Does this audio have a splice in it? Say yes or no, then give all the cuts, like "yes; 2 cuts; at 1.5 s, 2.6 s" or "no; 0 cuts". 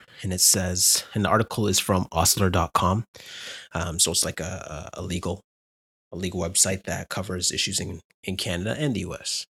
no; 0 cuts